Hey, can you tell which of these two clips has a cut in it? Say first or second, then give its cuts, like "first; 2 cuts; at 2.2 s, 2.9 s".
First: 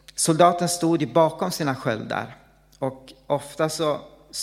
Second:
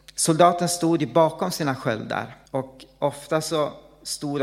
second; 1 cut; at 2.5 s